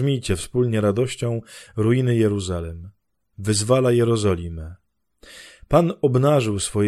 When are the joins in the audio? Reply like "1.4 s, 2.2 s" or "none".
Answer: 3.3 s